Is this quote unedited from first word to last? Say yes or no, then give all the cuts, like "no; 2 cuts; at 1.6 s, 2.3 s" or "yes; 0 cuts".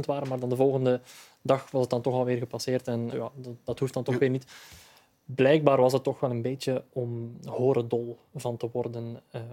no; 1 cut; at 3.1 s